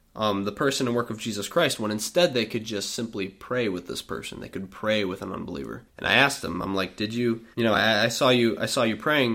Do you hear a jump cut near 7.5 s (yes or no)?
yes